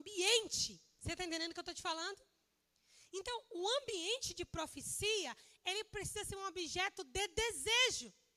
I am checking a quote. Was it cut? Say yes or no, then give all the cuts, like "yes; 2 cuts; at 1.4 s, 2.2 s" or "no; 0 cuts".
no; 0 cuts